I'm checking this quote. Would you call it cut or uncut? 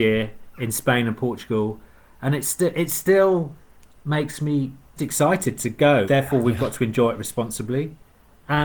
cut